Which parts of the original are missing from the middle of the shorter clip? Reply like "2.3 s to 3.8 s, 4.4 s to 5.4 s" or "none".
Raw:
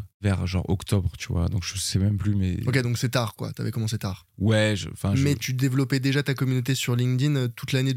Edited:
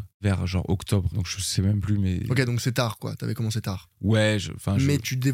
1.1 s to 1.5 s